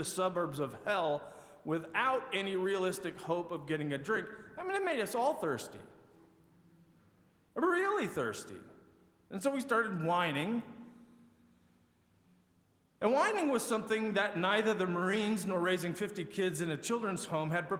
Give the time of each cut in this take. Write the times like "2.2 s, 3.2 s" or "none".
none